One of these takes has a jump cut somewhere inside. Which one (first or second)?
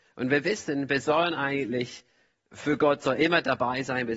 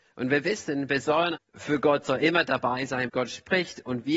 second